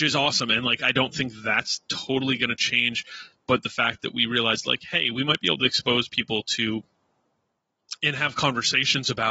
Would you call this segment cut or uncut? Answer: uncut